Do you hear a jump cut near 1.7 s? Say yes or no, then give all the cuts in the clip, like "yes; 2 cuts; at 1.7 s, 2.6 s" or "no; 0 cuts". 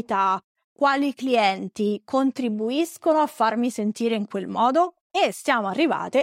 no; 1 cut; at 5.1 s